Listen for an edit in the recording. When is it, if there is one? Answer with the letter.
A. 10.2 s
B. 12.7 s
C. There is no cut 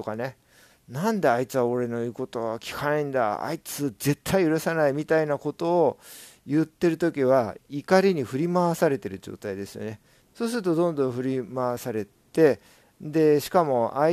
A